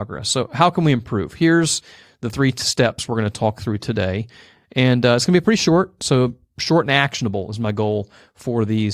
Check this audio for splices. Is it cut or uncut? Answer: uncut